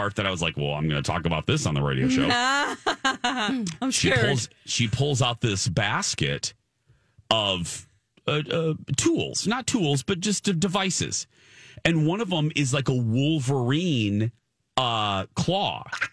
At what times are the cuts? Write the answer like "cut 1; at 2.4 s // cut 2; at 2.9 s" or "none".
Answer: none

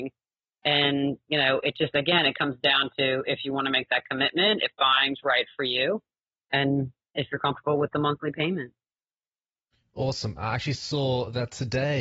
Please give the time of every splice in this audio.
cut 1; at 10.4 s

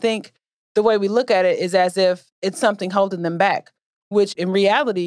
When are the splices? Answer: none

